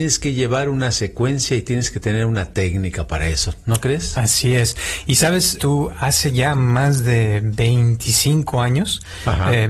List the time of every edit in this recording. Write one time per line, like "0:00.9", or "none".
0:05.6